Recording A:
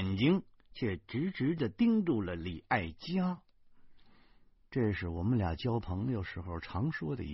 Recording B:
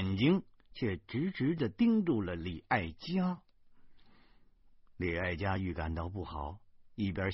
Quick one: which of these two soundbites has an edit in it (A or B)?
A